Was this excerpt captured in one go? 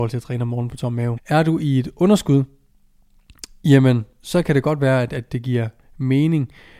no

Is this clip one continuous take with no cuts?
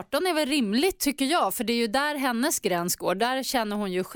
yes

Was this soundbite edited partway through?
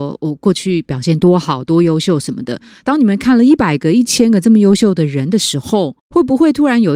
yes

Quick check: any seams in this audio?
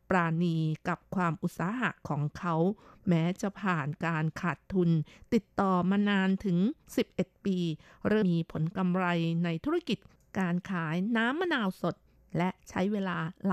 yes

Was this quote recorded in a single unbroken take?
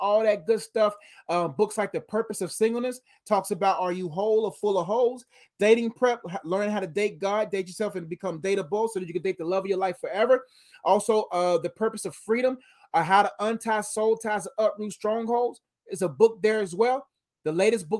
yes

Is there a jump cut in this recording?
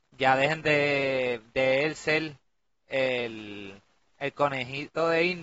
no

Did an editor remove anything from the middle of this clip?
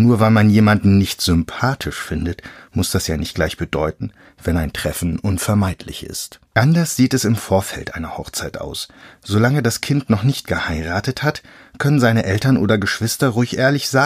yes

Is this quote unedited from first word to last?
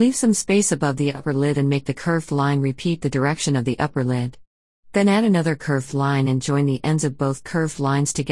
yes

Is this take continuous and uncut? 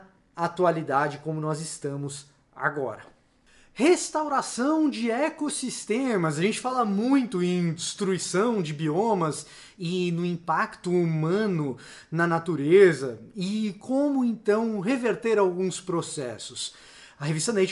yes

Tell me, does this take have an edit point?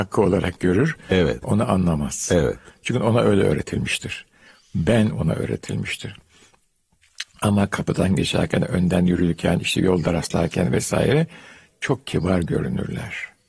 yes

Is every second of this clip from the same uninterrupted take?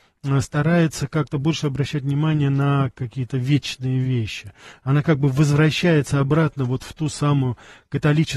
yes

